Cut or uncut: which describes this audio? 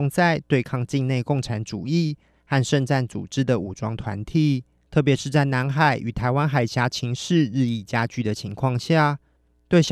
cut